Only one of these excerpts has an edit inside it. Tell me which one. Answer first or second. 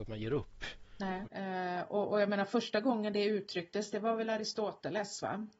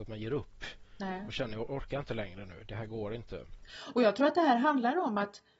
first